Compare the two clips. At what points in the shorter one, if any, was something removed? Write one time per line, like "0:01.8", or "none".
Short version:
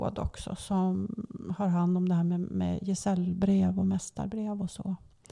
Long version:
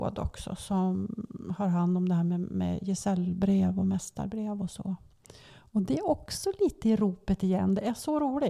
none